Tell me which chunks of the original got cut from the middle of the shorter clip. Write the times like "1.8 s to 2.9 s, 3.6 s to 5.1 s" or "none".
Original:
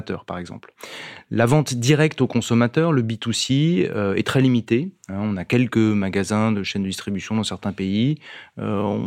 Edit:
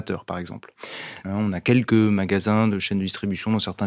1.2 s to 5.0 s